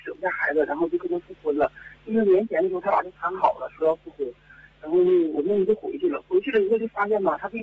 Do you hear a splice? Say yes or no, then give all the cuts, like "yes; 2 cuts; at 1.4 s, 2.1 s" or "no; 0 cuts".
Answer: no; 0 cuts